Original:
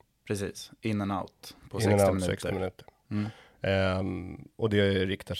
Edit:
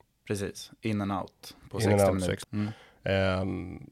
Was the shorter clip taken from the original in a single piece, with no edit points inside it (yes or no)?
no